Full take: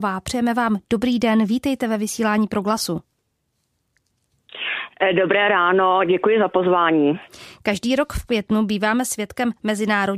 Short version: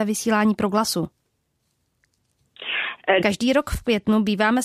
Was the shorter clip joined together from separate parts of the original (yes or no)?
yes